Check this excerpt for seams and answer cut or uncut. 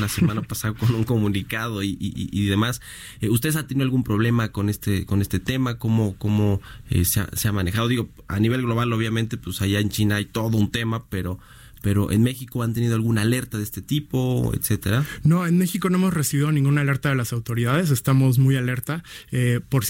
uncut